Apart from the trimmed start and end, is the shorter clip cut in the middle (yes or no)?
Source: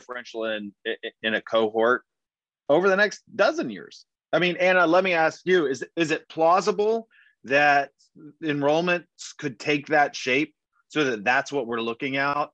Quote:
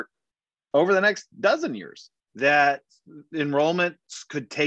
yes